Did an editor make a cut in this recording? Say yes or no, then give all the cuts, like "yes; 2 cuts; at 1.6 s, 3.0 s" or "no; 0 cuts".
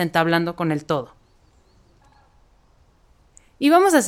no; 0 cuts